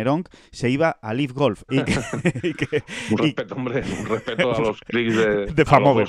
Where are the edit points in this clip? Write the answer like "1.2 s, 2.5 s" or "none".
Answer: 1.7 s